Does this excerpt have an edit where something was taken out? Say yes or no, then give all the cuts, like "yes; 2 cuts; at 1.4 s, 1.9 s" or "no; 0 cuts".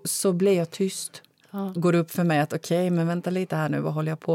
yes; 1 cut; at 1.8 s